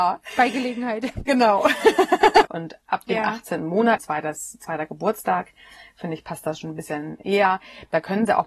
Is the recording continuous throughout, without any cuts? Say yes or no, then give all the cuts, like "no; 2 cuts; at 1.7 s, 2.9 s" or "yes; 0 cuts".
no; 2 cuts; at 2.4 s, 4.0 s